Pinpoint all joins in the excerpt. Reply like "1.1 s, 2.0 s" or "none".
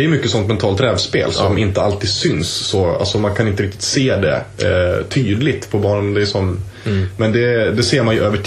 none